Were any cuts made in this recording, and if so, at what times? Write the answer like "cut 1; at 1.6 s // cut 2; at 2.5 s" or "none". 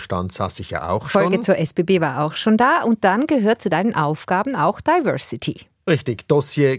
none